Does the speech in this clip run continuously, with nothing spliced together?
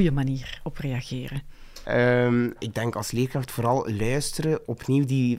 yes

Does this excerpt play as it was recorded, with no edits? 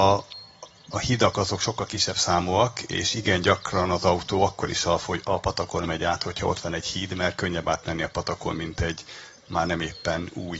yes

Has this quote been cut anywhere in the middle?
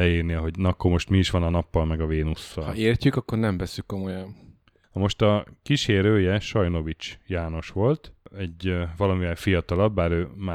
no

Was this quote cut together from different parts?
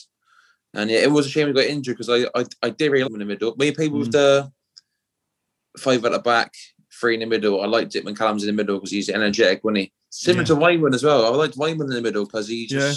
yes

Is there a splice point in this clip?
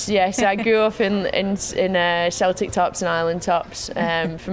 no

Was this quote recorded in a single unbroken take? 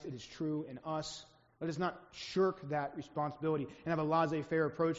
no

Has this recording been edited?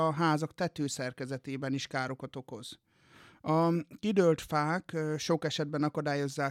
no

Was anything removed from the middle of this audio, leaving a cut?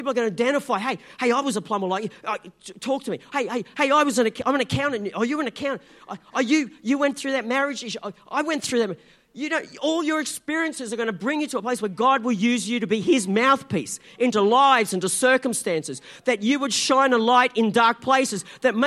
no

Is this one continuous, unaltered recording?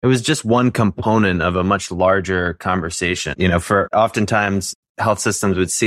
no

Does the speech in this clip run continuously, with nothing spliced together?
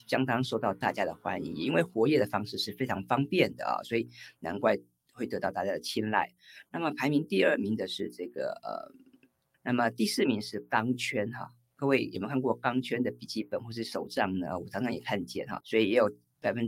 no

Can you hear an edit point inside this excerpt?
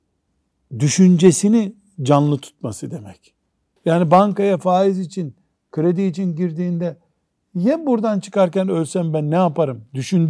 yes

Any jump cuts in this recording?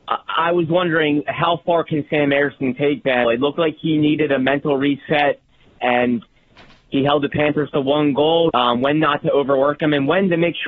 yes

